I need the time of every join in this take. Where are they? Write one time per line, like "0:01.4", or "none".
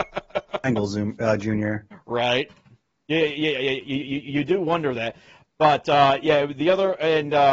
none